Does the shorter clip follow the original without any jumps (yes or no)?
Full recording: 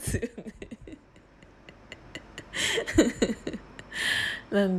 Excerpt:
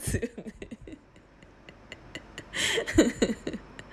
yes